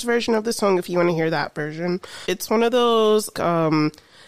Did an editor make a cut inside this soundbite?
yes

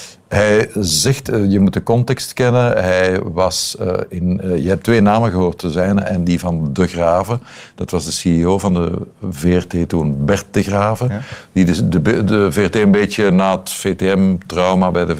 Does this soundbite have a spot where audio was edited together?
no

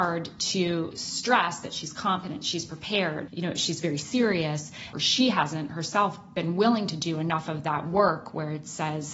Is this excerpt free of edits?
no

